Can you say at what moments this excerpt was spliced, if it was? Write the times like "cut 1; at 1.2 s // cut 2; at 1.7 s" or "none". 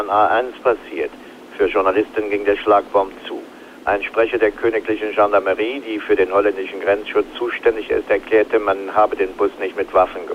cut 1; at 1.5 s